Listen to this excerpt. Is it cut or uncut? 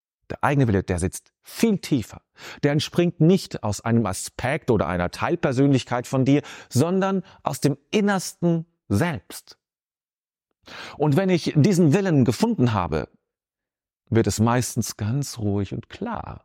uncut